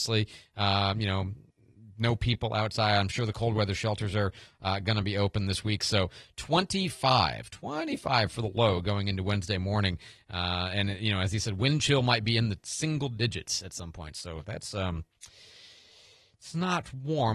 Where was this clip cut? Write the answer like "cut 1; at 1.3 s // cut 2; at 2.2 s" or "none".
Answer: none